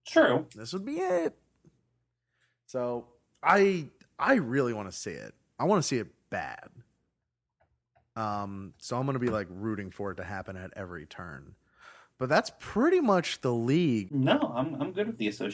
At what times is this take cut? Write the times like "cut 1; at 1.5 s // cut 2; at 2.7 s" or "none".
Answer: cut 1; at 14.1 s